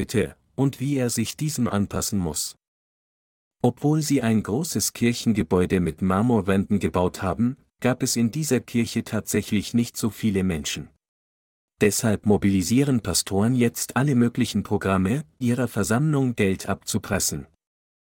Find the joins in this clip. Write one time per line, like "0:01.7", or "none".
0:11.6
0:15.4